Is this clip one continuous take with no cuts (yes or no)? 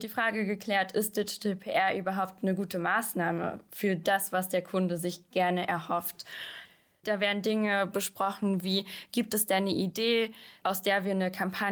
no